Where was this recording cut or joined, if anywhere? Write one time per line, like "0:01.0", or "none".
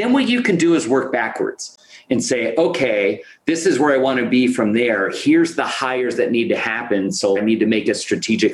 0:07.4